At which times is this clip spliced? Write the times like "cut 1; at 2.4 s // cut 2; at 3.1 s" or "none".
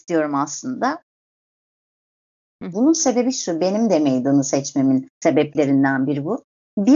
cut 1; at 2.7 s // cut 2; at 5.1 s